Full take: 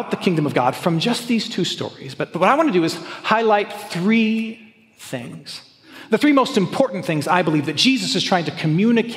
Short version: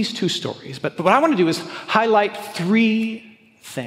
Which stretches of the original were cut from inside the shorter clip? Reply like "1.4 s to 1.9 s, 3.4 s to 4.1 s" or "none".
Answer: none